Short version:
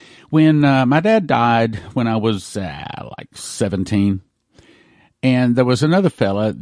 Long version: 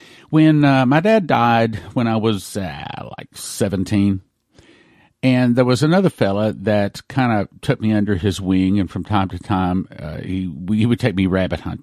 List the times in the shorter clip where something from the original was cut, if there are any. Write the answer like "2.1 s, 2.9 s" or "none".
none